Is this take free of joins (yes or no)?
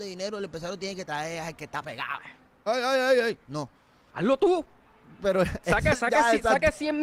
no